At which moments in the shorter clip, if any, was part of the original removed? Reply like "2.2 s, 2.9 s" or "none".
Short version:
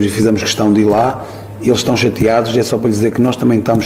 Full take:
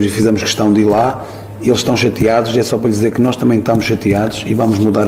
none